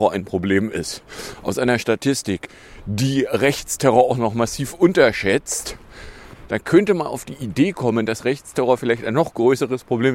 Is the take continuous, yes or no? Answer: yes